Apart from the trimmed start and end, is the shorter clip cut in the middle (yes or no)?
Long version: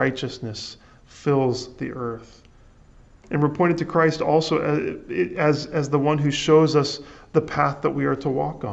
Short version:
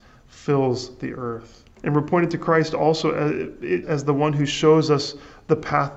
yes